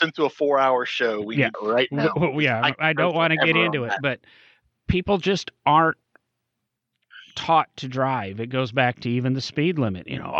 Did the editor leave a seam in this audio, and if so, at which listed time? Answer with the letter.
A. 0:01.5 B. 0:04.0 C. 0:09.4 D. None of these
A